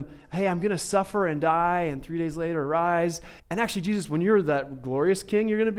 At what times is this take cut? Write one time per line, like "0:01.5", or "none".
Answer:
0:03.4

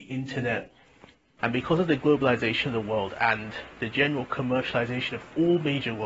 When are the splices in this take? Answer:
0:01.4

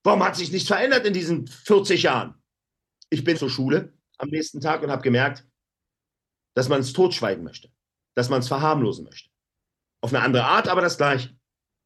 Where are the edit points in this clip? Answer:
0:03.3
0:10.0

